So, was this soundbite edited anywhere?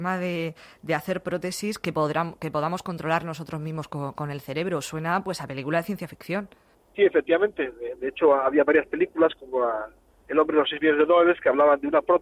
no; 0 cuts

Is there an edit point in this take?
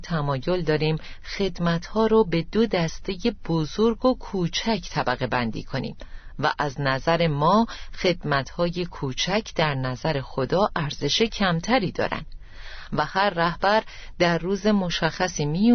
yes; 1 cut; at 12.9 s

